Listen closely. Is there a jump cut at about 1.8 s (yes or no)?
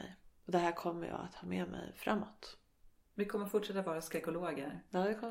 no